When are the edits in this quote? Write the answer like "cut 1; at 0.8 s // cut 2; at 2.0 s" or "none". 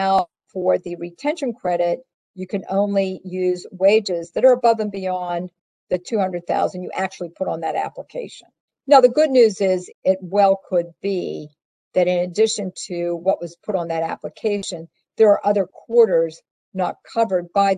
cut 1; at 8.7 s // cut 2; at 9.9 s